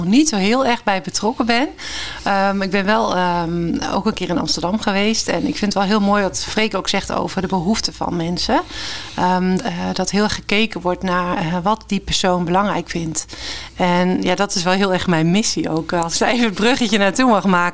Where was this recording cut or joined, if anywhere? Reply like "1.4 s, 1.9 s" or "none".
9.6 s